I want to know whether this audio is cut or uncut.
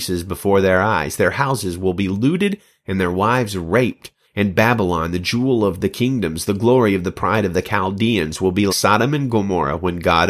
cut